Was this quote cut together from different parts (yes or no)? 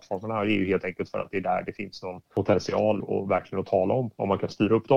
yes